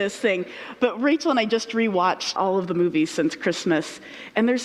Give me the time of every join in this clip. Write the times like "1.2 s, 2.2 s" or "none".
2.4 s